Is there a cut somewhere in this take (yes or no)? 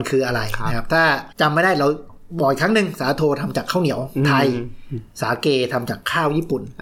yes